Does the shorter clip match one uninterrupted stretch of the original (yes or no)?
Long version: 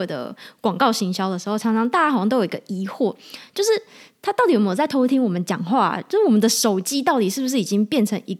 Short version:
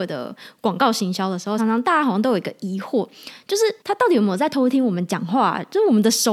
no